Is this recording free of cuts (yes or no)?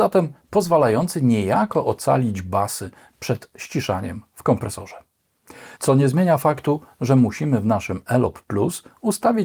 no